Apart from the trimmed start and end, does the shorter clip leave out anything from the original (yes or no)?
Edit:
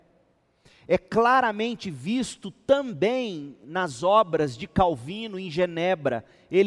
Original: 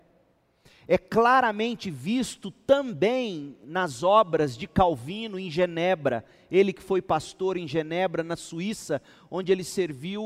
no